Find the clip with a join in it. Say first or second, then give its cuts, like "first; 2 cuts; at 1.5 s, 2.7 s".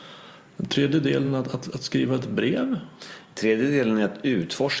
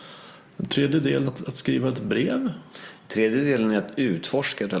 second; 1 cut; at 1.2 s